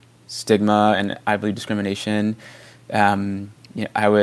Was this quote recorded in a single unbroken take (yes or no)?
yes